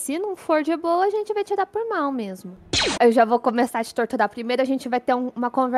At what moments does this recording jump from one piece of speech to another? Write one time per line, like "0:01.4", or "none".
0:02.9